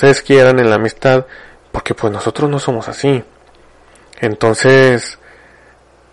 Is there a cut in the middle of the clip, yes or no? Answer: no